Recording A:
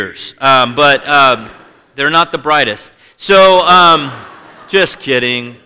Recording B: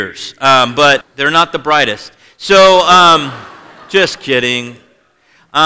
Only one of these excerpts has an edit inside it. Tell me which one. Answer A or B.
B